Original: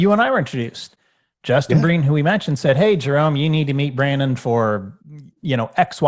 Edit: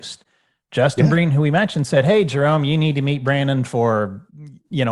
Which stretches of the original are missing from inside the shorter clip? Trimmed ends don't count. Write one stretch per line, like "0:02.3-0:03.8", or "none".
none

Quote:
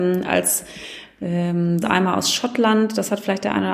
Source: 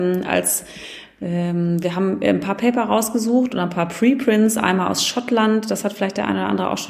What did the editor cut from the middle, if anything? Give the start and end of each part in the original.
0:01.8-0:04.5

